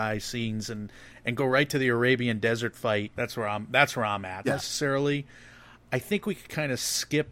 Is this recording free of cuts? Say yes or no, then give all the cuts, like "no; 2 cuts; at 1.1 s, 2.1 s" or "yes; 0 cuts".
no; 2 cuts; at 3.2 s, 4.4 s